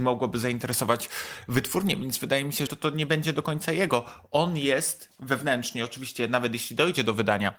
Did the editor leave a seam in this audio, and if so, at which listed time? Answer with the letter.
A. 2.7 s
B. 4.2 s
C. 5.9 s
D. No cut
A